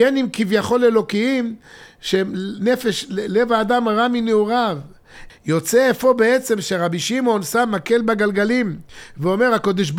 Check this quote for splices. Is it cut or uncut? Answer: cut